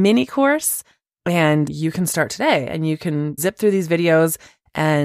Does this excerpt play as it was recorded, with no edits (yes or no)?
no